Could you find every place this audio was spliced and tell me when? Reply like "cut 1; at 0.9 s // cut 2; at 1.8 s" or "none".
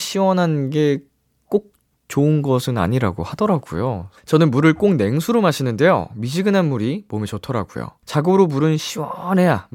cut 1; at 4.2 s // cut 2; at 8.0 s